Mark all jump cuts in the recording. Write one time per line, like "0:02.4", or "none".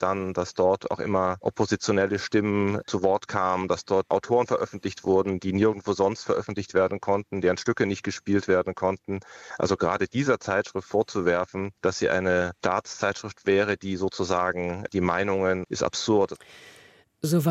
0:15.6